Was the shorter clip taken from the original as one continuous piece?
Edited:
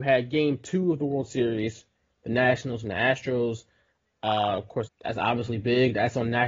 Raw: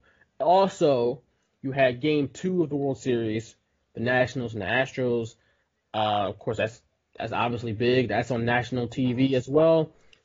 no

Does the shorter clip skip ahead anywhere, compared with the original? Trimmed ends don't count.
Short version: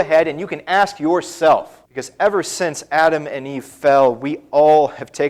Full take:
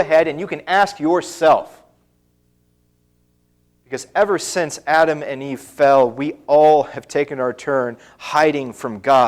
yes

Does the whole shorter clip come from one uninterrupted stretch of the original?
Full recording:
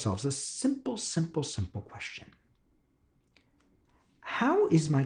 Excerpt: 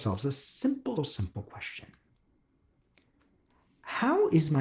no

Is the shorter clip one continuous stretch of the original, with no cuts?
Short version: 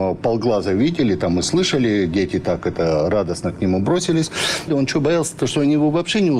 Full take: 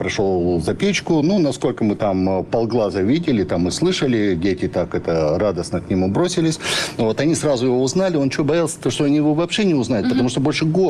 no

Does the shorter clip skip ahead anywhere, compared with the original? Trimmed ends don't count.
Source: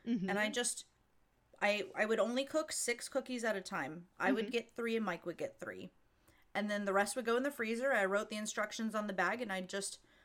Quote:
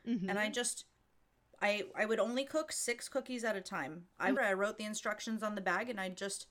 yes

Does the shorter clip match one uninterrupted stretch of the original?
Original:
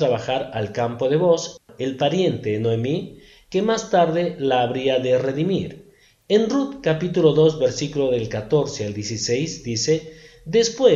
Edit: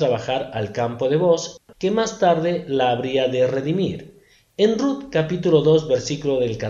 no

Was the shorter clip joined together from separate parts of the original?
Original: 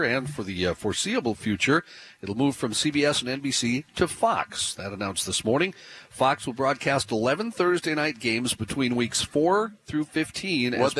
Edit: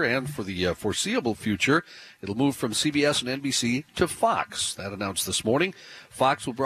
no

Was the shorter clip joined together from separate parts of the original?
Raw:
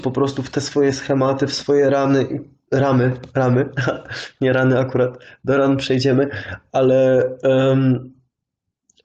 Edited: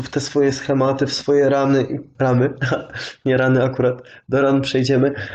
yes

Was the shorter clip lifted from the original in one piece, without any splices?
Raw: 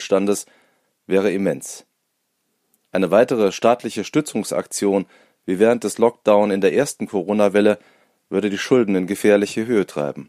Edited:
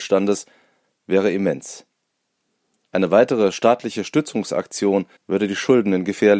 no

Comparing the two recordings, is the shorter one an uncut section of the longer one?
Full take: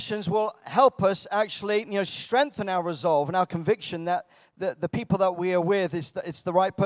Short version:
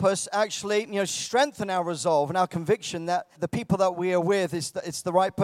no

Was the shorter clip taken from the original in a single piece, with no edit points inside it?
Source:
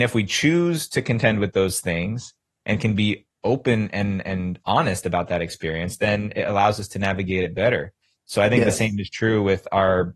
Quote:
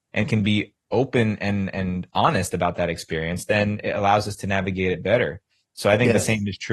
yes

